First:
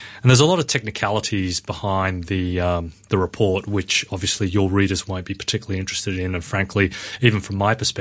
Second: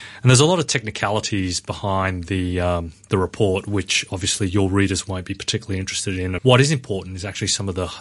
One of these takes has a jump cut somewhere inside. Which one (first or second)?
second